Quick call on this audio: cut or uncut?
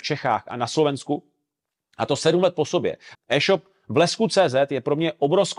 cut